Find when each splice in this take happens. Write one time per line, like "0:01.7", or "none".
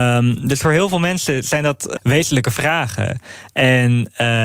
0:02.0